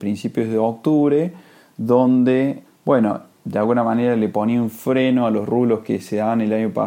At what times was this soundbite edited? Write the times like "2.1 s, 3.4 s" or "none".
2.6 s